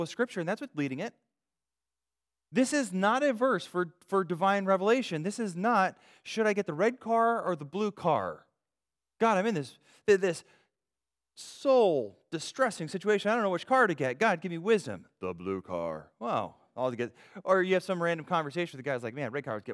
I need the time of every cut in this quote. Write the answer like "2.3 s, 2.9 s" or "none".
none